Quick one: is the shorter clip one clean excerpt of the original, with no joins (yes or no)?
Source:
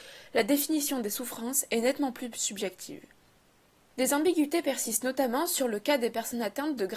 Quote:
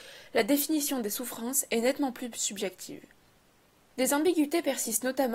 yes